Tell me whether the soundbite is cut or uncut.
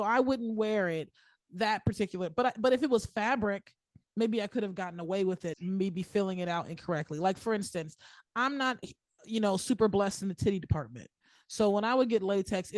cut